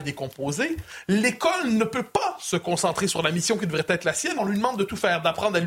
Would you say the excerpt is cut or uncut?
cut